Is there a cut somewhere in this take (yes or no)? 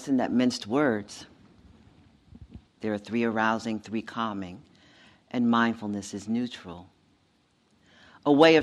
yes